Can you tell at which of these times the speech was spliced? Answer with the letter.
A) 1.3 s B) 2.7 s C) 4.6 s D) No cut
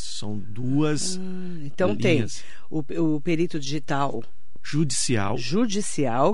D